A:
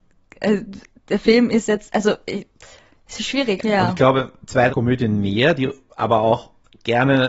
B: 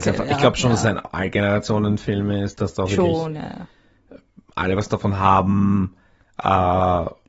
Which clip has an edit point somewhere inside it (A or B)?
A